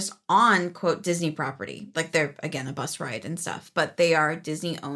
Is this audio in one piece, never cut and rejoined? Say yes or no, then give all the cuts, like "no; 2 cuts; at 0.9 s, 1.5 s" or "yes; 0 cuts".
yes; 0 cuts